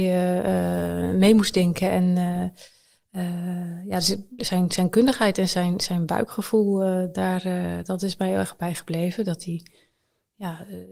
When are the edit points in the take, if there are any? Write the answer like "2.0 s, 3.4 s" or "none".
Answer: 4.4 s

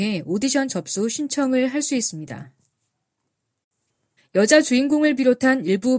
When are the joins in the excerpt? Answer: 4.2 s

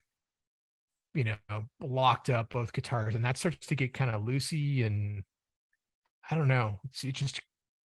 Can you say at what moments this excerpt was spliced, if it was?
none

